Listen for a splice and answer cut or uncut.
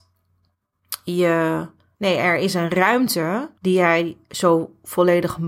cut